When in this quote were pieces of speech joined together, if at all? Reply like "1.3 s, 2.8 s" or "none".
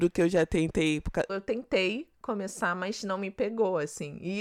1.3 s